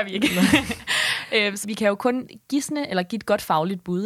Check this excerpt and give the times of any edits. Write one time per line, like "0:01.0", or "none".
0:01.6

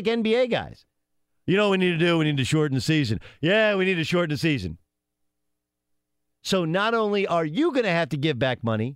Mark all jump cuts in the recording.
0:06.3

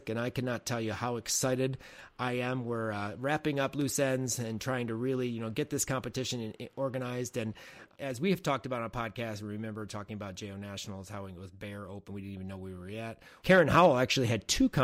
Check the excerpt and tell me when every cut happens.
0:13.4

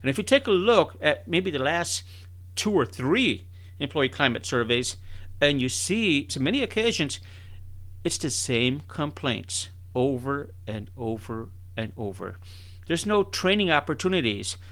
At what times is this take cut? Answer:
0:06.3
0:12.8

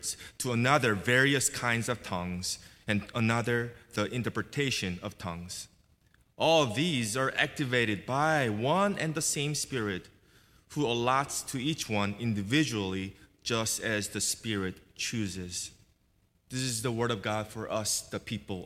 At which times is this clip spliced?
0:16.3

